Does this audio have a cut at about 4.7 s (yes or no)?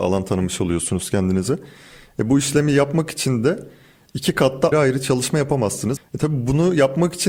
yes